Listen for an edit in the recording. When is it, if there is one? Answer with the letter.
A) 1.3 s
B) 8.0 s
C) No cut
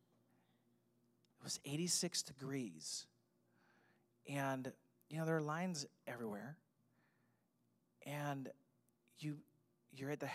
A